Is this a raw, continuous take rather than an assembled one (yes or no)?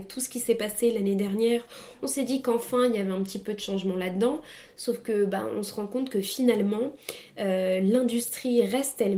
yes